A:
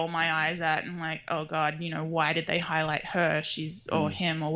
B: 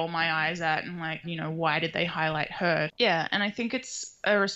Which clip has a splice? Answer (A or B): B